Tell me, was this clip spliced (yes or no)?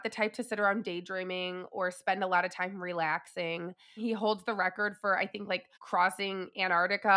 yes